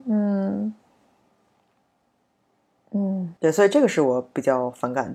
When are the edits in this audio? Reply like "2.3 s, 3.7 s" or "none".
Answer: 3.4 s

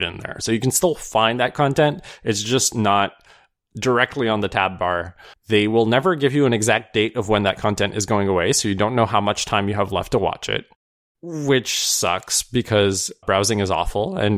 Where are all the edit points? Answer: 5.3 s, 13.2 s

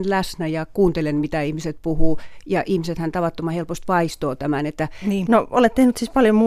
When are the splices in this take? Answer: 5.3 s

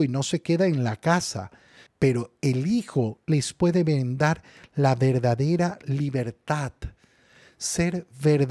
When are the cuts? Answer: 1.9 s

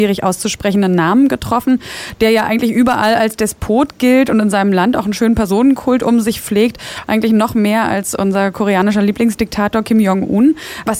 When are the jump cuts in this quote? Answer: none

